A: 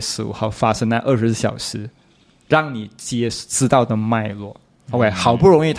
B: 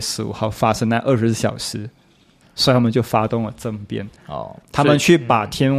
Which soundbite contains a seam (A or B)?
B